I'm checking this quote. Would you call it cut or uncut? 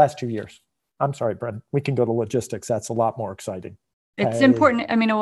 cut